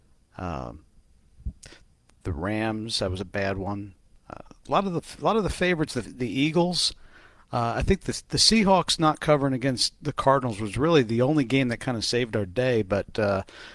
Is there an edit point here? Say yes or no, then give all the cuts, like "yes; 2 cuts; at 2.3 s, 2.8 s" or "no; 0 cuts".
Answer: no; 0 cuts